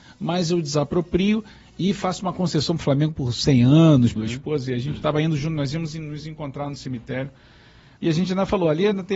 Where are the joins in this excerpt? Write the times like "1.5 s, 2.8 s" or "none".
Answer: 4.2 s, 8.0 s